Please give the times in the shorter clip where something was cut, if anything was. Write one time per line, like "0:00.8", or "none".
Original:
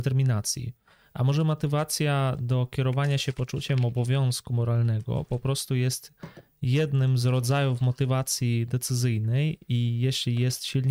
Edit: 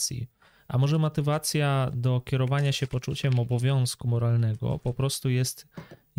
none

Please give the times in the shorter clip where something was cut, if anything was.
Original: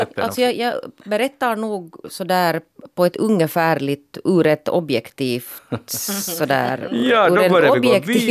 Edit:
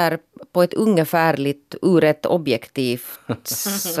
none

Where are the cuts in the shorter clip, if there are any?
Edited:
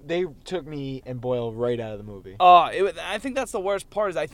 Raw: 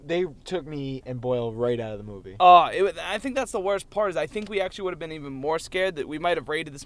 none

